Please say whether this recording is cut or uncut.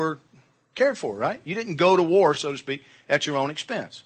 uncut